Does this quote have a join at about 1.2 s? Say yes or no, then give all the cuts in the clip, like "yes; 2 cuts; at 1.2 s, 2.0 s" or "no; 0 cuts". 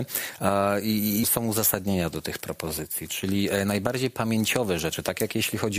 yes; 1 cut; at 1.2 s